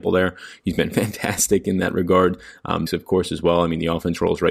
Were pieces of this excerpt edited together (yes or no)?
yes